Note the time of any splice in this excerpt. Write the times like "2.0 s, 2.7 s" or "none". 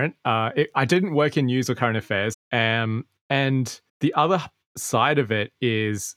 2.3 s, 3.9 s